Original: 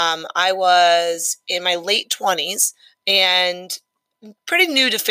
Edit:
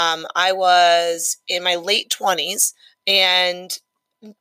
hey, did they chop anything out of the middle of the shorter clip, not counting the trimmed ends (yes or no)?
no